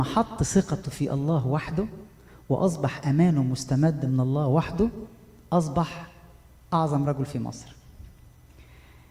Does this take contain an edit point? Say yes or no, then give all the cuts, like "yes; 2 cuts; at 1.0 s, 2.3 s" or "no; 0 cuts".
no; 0 cuts